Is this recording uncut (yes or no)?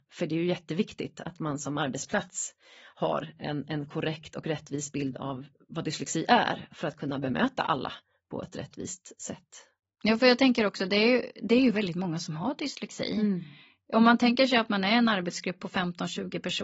yes